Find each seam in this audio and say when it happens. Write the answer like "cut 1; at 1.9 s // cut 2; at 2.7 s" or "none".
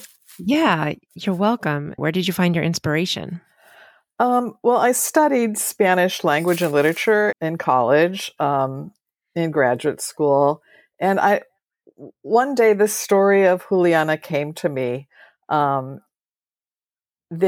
cut 1; at 2.0 s // cut 2; at 7.3 s